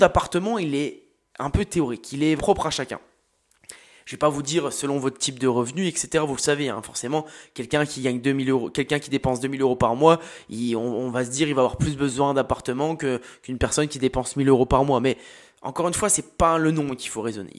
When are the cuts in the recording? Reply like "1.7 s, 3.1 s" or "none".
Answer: 2.4 s